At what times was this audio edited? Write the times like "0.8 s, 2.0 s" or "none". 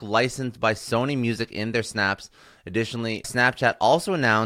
3.2 s